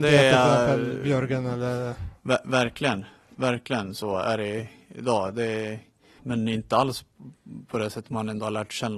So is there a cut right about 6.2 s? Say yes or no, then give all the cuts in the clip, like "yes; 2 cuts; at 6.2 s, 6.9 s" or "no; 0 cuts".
yes; 1 cut; at 6.2 s